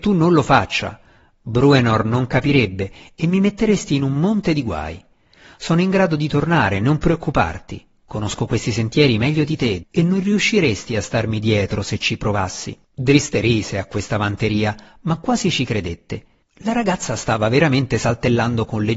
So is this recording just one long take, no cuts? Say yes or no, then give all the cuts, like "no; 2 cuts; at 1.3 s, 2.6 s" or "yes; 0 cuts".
no; 3 cuts; at 9.8 s, 12.8 s, 16.4 s